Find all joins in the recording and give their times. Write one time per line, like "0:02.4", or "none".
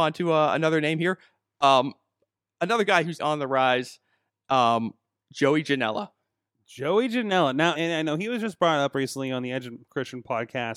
0:03.2
0:07.8